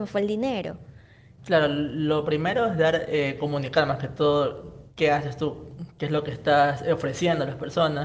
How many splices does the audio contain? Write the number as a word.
one